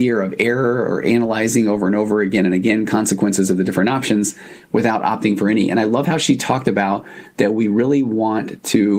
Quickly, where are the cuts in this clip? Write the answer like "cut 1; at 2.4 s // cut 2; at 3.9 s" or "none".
none